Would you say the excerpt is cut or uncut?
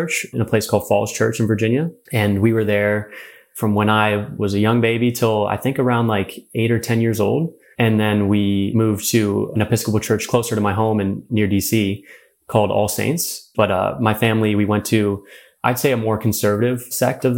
cut